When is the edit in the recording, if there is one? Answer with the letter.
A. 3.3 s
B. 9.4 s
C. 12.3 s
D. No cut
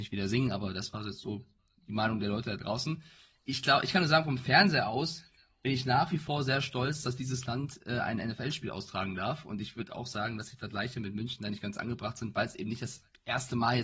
D